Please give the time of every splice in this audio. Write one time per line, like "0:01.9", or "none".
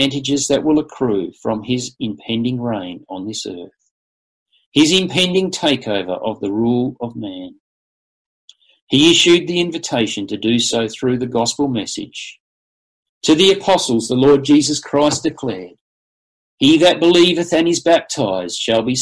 none